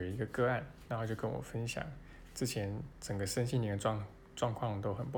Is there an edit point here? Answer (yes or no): no